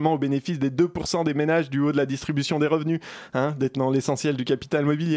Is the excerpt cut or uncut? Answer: uncut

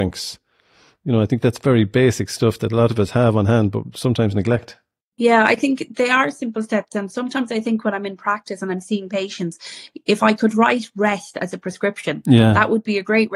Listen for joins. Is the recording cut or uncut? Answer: uncut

